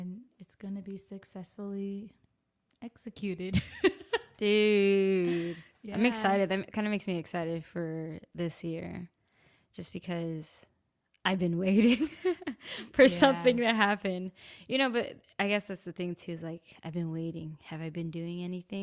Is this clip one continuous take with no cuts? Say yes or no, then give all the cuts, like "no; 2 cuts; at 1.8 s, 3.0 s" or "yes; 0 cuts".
yes; 0 cuts